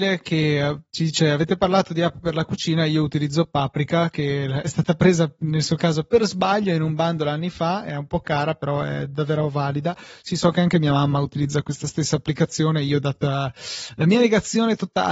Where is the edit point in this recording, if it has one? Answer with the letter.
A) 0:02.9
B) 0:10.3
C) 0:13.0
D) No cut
D